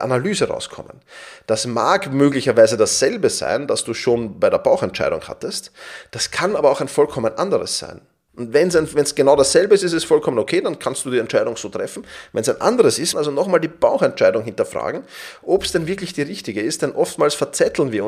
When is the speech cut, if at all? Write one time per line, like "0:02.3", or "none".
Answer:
0:13.1